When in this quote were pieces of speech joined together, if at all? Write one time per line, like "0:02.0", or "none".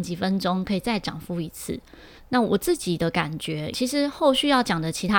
0:02.2
0:03.7